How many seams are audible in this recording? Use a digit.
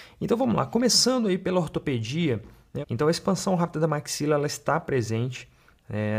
1